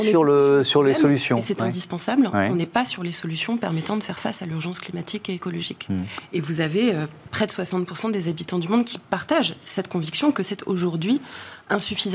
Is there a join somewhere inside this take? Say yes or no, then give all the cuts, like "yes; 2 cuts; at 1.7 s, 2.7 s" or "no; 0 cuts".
no; 0 cuts